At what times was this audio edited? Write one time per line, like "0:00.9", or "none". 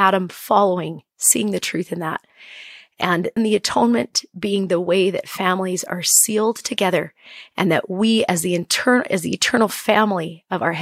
0:03.4